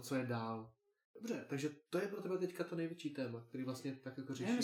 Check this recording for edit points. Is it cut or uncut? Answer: cut